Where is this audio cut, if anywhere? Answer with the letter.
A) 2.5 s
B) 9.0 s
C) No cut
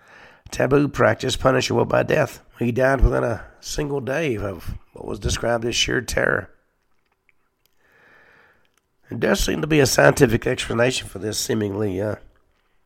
A